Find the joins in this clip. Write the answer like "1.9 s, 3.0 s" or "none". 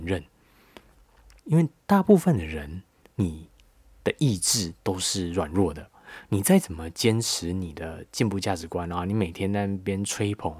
1.4 s